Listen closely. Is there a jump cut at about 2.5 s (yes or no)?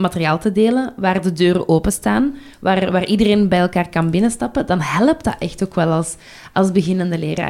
no